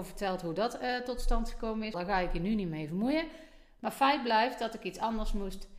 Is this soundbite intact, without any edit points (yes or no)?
no